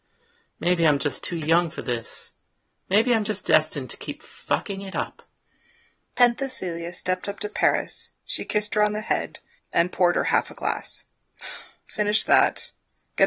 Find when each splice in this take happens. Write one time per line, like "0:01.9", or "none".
0:09.6